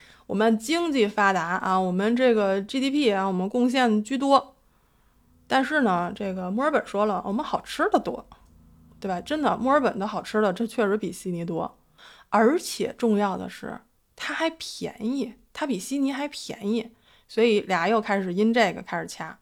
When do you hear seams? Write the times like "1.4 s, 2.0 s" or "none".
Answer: none